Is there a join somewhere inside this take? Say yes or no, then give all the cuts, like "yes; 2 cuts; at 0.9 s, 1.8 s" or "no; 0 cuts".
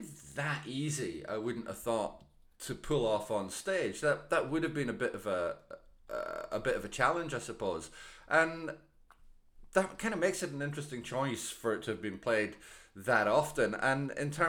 no; 0 cuts